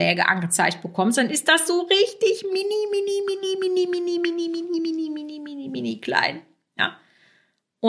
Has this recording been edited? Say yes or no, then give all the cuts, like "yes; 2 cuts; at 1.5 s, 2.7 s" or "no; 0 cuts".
no; 0 cuts